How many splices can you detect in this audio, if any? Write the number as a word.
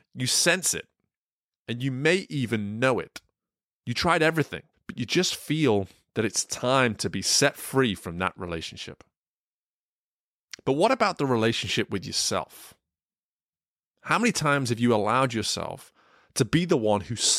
one